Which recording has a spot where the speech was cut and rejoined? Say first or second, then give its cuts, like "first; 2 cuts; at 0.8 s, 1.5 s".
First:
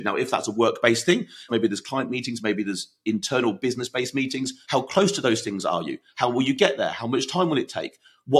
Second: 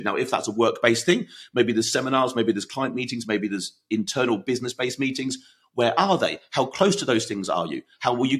first; 2 cuts; at 1.5 s, 4.6 s